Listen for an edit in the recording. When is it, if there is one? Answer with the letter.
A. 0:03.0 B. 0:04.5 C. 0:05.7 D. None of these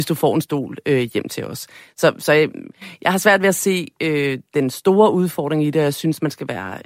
D